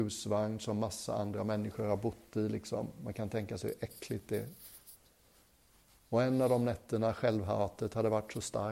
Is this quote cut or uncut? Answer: uncut